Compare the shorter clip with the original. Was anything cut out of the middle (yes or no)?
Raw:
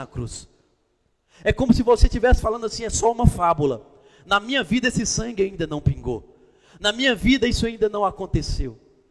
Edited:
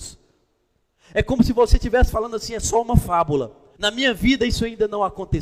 yes